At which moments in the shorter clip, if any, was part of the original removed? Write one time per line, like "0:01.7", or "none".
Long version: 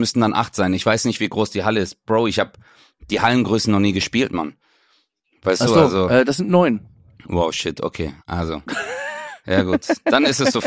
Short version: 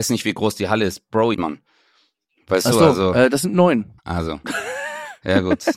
0:01.3
0:04.0